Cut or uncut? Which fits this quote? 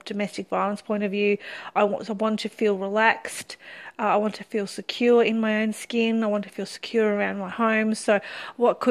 uncut